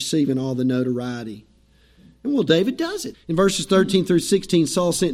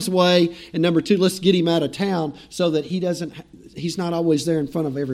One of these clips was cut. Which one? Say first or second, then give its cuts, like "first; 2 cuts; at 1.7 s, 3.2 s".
first; 1 cut; at 3.1 s